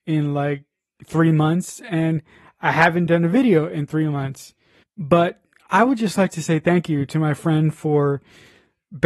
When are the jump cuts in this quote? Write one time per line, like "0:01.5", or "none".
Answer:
0:04.8